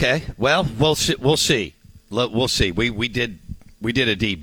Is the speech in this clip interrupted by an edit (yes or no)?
no